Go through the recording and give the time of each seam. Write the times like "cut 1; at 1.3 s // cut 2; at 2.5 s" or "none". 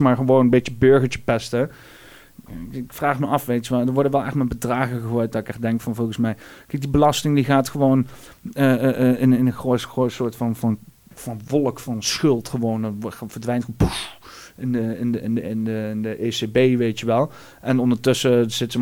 none